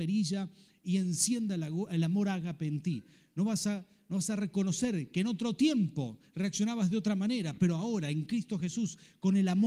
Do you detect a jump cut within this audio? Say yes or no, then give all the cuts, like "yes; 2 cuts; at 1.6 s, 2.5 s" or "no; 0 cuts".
no; 0 cuts